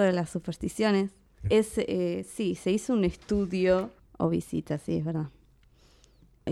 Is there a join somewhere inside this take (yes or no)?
yes